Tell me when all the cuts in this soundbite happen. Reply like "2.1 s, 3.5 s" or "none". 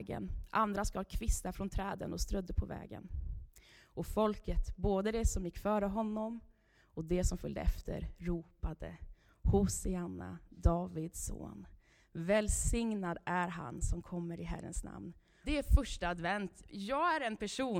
15.4 s